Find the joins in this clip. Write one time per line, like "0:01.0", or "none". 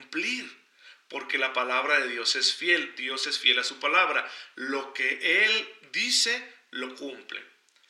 none

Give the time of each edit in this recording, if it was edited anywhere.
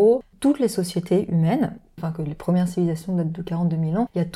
0:02.0

